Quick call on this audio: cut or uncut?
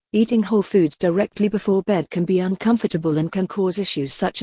uncut